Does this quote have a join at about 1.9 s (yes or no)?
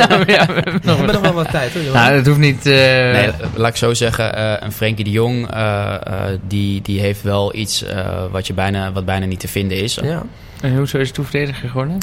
no